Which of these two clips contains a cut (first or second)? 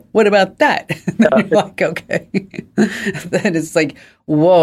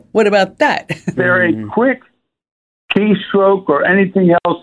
second